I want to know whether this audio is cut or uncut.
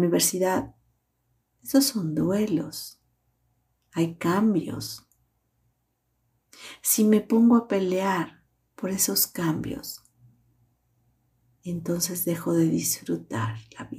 uncut